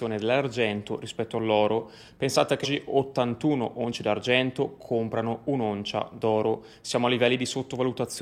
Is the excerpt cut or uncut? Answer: cut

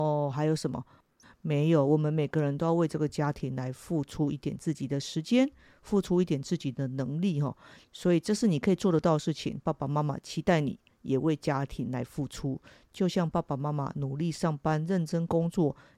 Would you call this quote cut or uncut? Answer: cut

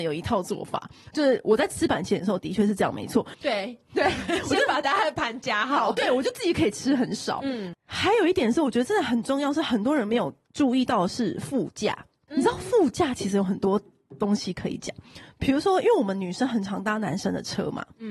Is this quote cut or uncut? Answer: cut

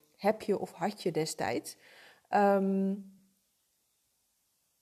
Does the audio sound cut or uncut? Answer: uncut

